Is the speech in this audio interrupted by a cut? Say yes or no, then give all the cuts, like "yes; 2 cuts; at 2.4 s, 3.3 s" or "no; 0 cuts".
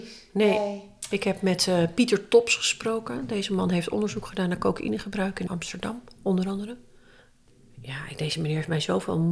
yes; 1 cut; at 5.5 s